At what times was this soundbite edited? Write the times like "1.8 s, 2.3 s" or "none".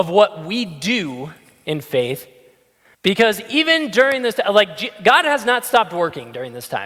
2.9 s